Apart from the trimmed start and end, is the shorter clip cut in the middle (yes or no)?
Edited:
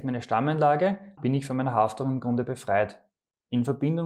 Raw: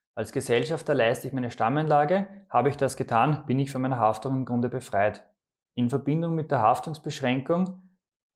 yes